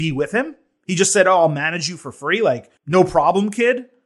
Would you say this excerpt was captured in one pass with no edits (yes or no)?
no